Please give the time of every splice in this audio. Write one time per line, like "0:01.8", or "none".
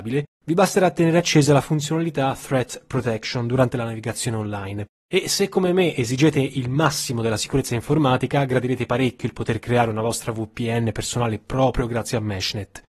0:05.0